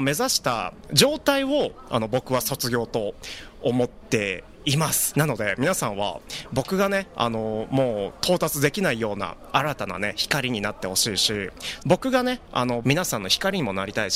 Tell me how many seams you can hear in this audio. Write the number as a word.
three